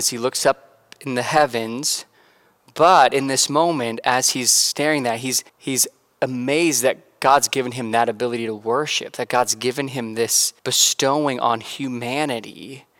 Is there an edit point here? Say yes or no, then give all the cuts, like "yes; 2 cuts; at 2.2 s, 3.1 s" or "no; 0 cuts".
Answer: yes; 2 cuts; at 5.5 s, 10.6 s